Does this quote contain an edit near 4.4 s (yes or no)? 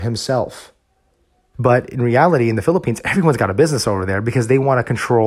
no